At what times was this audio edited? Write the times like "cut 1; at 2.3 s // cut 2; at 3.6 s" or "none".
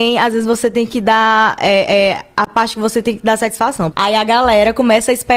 cut 1; at 3.9 s